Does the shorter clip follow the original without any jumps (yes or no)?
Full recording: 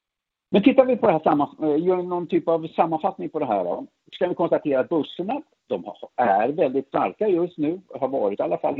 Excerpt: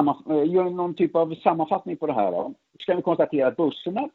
yes